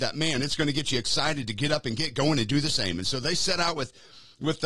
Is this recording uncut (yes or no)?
yes